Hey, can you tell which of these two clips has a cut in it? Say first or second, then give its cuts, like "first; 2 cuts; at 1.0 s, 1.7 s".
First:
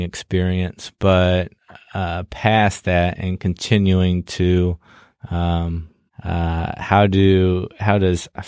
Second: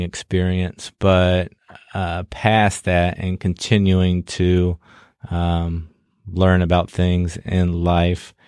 first; 1 cut; at 6.1 s